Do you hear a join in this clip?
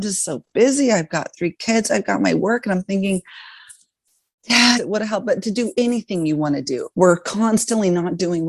yes; 2 cuts; at 4.8 s, 6.9 s

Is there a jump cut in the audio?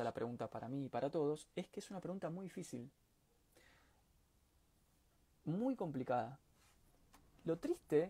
no; 0 cuts

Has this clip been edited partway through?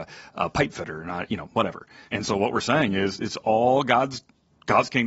yes; 1 cut; at 2.1 s

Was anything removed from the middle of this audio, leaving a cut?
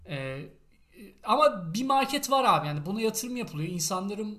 no; 0 cuts

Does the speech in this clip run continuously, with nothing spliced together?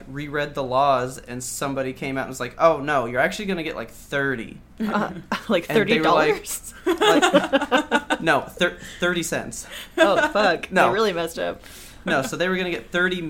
yes; 0 cuts

